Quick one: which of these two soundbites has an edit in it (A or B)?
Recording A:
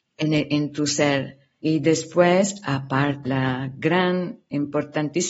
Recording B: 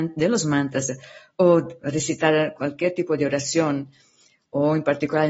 A